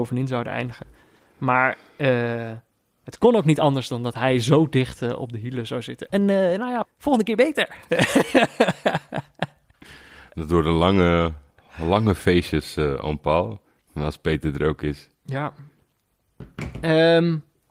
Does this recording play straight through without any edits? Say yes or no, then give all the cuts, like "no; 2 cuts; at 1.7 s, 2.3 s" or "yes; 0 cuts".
no; 1 cut; at 6.8 s